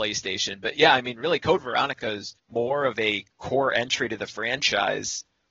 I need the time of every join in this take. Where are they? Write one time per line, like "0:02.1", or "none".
0:02.4